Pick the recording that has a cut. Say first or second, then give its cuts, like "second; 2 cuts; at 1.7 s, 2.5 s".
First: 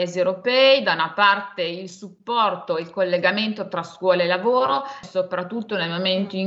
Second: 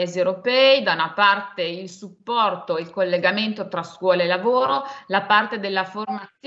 first; 1 cut; at 5.0 s